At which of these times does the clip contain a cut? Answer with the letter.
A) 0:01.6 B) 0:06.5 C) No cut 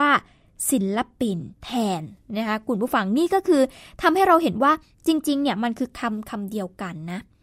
A